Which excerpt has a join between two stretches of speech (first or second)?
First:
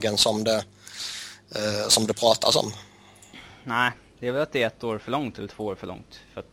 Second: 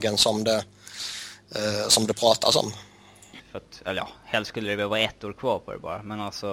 second